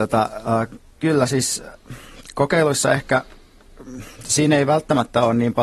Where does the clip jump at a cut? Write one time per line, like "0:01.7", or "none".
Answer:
none